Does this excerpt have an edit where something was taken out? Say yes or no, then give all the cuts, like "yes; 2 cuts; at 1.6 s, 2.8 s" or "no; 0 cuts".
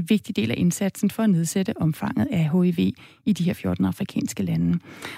no; 0 cuts